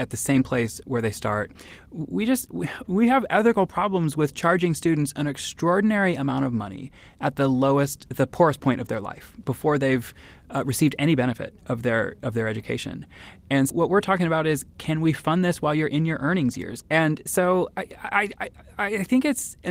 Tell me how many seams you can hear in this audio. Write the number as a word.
two